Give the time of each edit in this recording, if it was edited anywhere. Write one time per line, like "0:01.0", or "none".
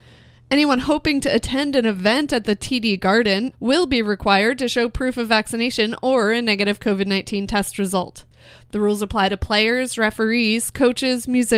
0:03.5